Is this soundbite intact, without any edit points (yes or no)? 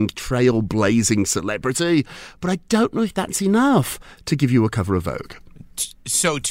yes